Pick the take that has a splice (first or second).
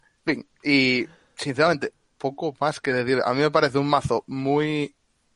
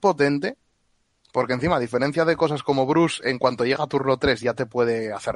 first